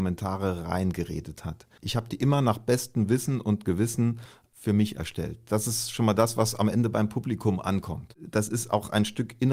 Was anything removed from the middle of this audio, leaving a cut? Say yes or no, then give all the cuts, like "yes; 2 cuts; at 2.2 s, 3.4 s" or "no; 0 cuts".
yes; 1 cut; at 1.8 s